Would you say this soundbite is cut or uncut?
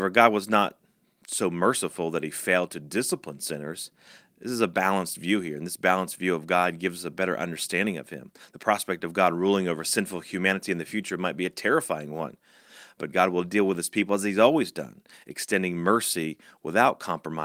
uncut